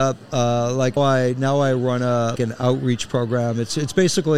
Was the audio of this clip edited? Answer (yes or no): yes